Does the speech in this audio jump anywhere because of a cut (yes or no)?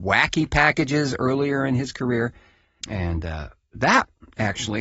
yes